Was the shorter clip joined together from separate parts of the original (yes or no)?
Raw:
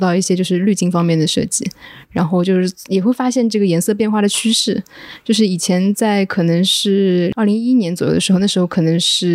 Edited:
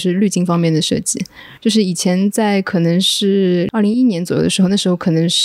yes